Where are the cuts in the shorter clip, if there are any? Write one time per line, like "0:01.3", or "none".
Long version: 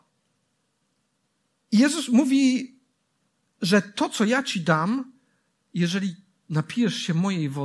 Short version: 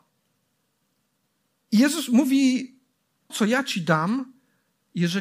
0:03.3